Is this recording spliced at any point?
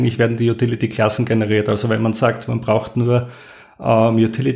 no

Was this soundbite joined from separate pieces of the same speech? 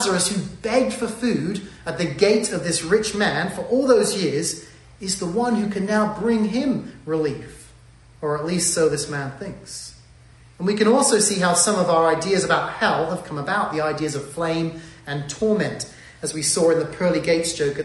no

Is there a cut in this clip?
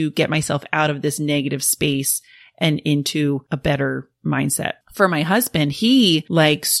no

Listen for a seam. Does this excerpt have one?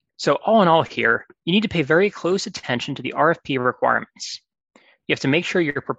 yes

